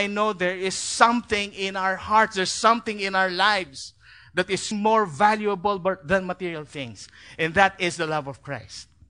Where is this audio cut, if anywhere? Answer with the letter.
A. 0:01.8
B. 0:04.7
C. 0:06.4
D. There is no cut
B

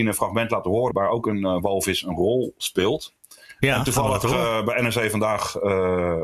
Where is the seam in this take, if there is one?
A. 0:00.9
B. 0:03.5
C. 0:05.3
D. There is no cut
A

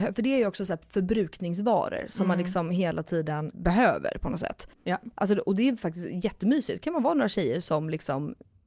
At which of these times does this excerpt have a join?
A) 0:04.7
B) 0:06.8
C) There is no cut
A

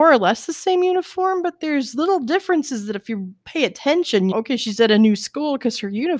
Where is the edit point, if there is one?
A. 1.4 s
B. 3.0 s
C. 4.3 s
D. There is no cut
C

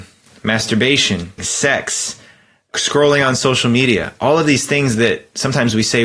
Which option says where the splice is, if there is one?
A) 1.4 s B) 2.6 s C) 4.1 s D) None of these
A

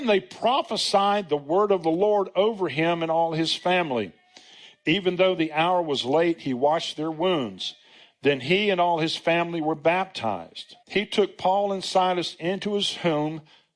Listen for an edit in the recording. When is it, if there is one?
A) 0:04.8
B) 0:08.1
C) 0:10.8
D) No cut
C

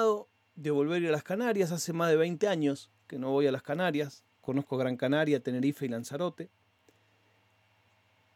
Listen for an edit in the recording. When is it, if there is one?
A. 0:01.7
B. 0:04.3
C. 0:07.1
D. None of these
B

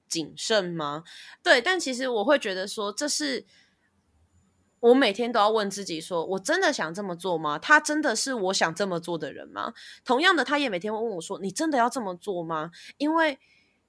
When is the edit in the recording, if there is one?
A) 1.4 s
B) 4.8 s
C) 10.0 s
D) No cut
A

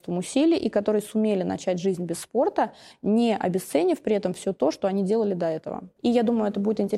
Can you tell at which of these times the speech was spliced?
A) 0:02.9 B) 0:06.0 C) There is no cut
B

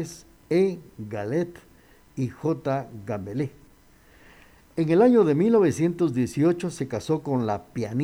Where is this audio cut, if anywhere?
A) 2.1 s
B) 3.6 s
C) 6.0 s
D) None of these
D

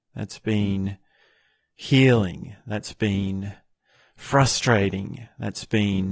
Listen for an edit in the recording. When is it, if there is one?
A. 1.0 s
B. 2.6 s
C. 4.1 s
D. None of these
D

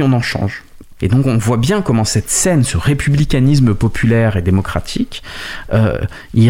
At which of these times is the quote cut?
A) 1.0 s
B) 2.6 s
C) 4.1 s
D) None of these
A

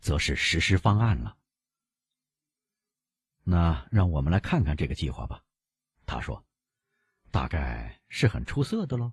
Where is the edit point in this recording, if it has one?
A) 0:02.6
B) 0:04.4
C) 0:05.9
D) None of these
D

